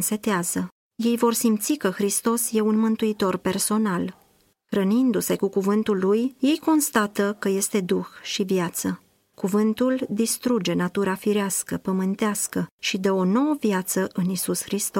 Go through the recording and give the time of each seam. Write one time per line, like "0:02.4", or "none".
none